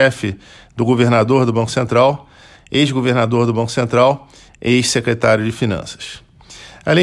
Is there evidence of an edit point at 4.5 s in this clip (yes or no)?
yes